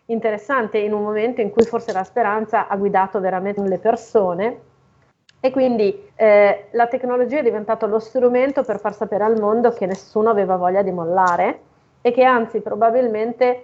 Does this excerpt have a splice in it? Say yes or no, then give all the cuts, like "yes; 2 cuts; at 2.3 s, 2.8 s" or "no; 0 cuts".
yes; 2 cuts; at 3.6 s, 6.1 s